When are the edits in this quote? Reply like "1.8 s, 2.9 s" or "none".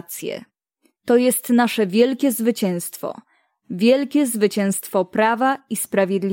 none